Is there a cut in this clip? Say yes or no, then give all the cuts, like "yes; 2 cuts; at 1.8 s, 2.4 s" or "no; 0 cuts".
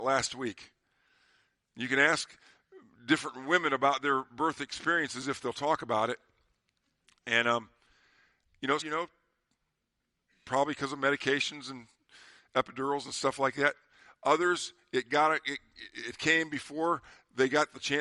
yes; 1 cut; at 8.8 s